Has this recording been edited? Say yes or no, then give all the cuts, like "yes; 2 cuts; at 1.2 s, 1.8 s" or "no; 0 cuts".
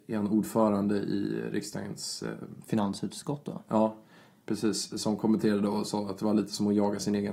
no; 0 cuts